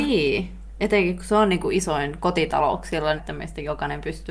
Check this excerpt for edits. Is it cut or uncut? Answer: cut